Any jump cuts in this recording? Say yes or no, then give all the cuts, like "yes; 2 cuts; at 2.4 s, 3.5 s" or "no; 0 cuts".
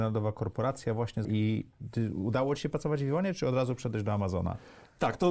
yes; 1 cut; at 1.2 s